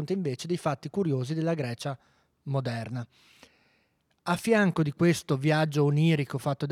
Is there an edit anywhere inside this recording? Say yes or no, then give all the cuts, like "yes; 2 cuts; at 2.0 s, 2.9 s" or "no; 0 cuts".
no; 0 cuts